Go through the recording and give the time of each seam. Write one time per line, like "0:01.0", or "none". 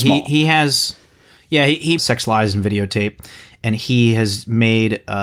0:02.0

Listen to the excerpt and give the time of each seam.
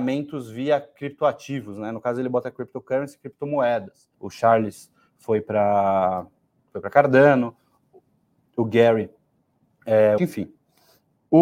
0:04.1
0:10.2

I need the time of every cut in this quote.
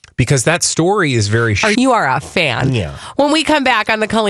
0:01.7

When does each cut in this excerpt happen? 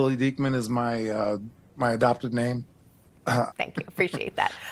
0:03.5

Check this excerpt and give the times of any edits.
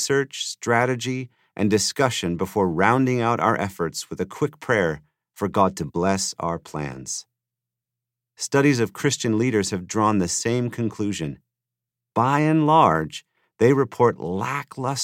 none

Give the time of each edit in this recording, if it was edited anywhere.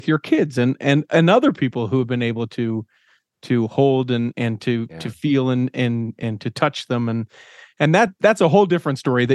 none

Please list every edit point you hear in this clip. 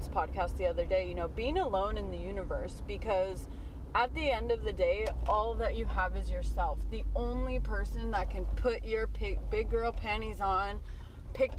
none

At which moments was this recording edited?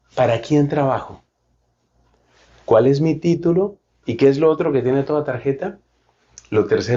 0:04.0

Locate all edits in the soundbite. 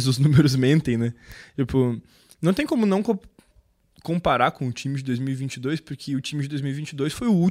none

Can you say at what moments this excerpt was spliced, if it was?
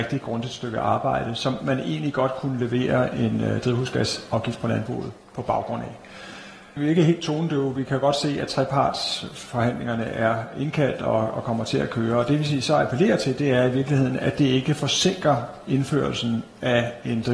none

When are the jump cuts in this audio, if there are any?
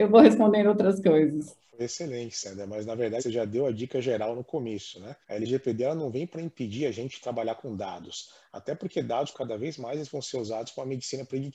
0:03.2
0:05.2
0:09.3

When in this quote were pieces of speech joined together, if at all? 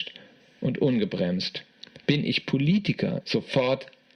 0:03.2

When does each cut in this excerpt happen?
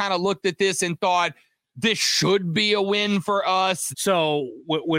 0:03.9

